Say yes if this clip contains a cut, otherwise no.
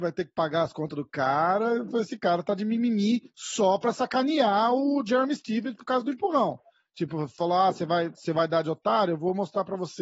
no